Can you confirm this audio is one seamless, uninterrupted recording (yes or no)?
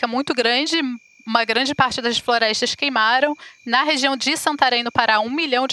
yes